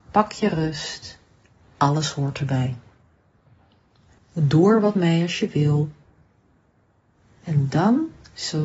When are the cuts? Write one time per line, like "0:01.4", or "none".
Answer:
0:04.2